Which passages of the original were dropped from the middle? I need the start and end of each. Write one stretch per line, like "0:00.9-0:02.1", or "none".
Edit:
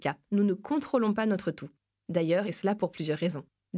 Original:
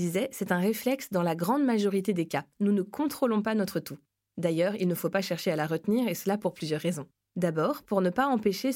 0:04.8-0:06.1